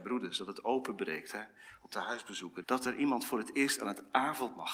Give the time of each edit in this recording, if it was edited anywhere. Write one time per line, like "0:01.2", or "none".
0:02.6